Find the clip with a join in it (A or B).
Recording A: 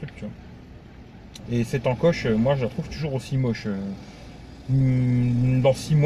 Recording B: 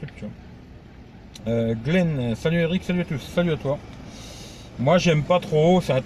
A